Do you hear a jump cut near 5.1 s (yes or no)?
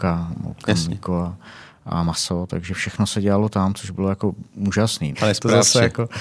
yes